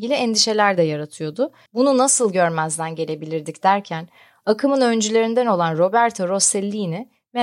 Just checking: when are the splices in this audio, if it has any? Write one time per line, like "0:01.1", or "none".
0:01.7